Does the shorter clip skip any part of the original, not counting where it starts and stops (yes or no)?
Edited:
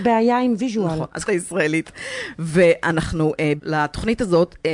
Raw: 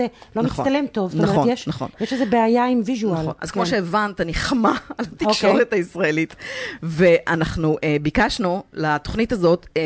yes